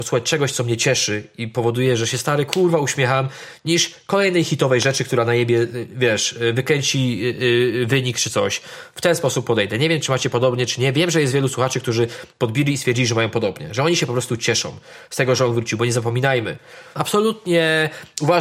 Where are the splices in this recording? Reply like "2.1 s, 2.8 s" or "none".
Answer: 16.9 s